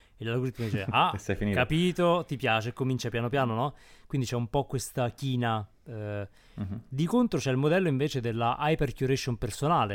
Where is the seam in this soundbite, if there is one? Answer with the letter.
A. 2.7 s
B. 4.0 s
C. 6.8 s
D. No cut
D